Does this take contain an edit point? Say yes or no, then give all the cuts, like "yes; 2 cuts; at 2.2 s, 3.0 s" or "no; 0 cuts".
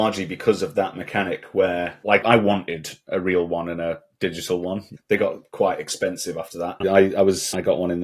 yes; 2 cuts; at 2.2 s, 6.8 s